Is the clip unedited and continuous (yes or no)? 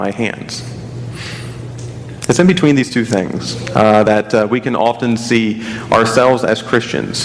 yes